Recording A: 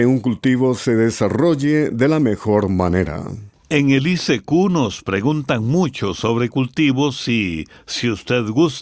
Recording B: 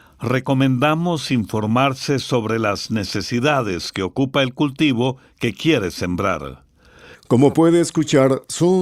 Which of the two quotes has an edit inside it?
B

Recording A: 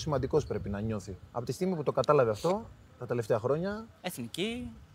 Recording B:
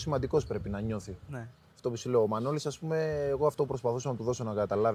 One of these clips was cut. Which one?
B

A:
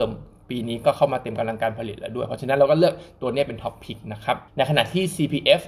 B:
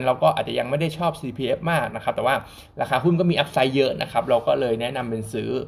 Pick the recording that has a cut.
A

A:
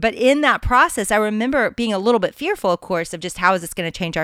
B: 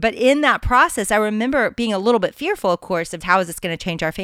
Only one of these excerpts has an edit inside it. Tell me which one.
B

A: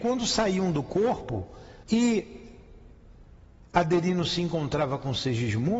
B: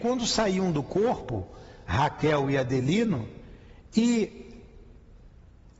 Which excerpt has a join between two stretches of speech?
A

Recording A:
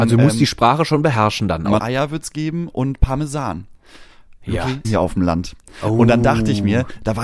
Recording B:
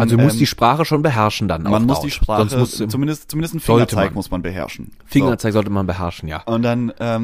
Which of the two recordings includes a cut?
A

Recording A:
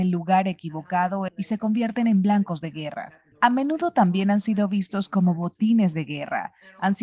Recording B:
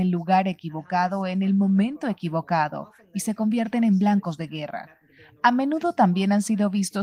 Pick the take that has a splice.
A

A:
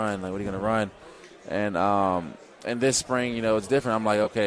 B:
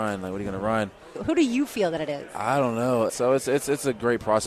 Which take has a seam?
B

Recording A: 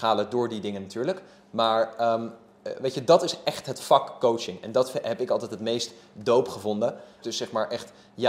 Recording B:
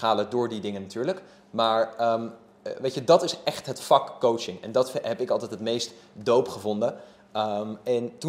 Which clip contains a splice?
A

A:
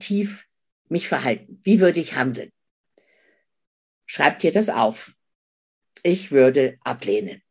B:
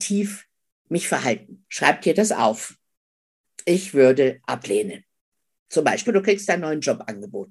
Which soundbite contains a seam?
B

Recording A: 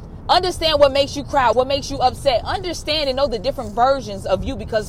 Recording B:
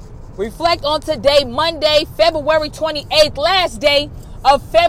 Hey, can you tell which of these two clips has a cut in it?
A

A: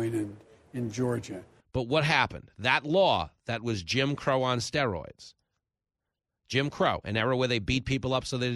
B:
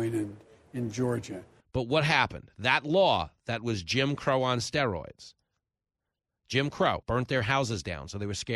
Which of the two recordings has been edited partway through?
B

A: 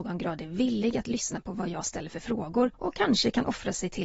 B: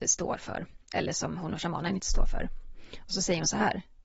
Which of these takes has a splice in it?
A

